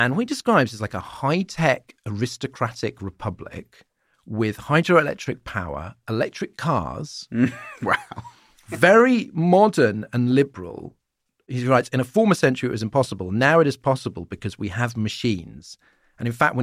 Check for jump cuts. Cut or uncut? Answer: uncut